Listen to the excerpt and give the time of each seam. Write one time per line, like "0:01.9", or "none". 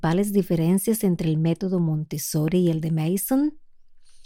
none